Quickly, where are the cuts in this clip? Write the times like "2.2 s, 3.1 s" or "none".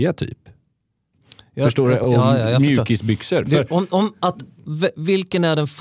none